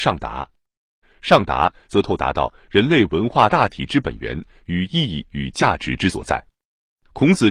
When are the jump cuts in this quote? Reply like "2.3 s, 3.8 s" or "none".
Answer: 1.0 s